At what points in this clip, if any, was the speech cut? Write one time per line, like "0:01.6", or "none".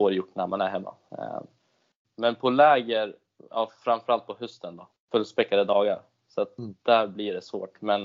0:02.0
0:04.9